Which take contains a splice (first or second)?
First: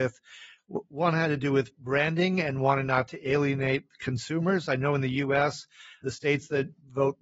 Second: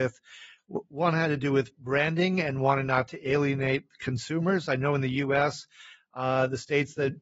first